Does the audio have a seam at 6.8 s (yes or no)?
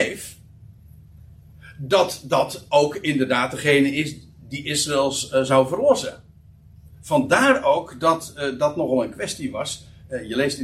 yes